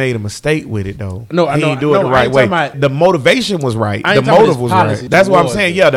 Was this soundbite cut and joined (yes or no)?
yes